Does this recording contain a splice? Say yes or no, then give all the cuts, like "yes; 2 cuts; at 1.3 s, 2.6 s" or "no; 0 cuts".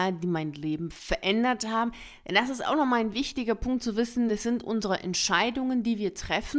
no; 0 cuts